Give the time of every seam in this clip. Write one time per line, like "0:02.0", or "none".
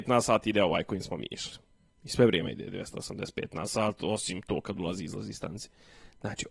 none